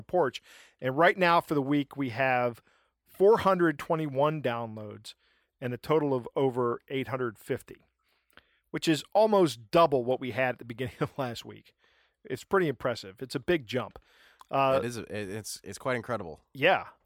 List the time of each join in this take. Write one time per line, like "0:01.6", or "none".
none